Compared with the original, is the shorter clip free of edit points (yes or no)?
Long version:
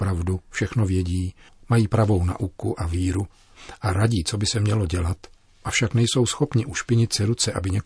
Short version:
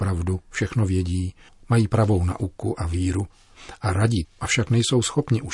no